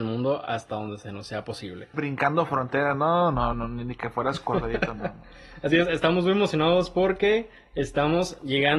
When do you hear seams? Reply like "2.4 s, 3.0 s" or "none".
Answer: 1.9 s

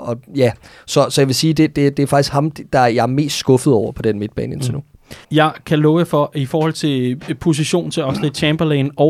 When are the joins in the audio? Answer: 5.2 s

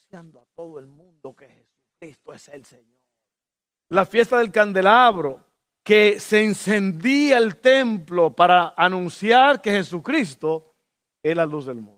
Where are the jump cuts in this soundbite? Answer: 3.7 s

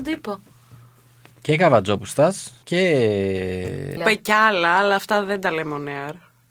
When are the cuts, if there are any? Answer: 2.6 s, 4.0 s

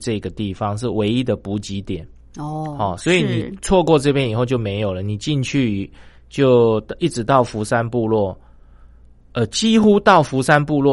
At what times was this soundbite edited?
none

